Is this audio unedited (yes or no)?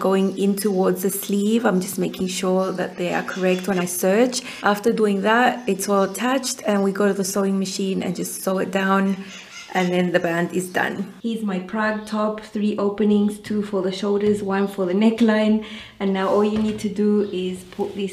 yes